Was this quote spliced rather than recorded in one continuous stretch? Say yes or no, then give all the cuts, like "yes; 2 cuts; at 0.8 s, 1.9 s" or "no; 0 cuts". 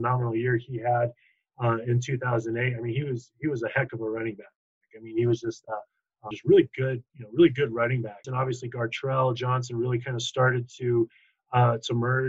yes; 2 cuts; at 6.3 s, 8.2 s